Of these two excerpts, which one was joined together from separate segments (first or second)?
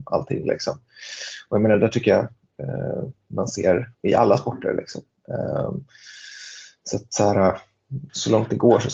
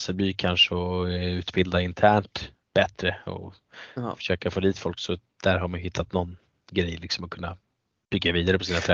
first